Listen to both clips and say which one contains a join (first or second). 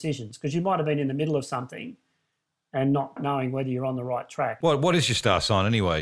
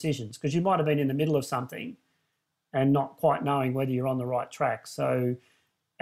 first